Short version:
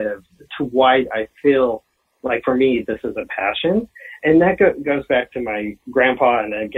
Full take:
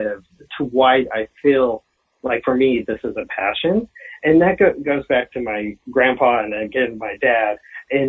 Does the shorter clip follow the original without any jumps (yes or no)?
yes